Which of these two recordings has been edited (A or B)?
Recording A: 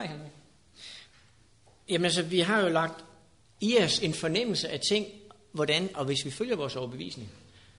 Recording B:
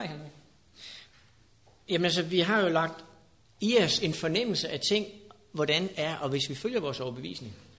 A